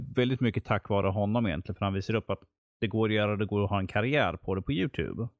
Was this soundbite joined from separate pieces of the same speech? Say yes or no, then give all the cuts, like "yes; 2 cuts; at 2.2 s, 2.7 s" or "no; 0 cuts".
no; 0 cuts